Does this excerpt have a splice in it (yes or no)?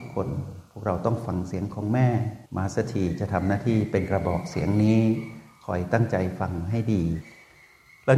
yes